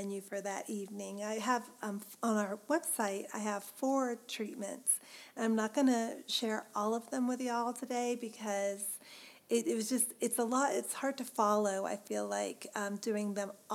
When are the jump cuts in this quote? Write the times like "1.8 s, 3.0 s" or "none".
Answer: none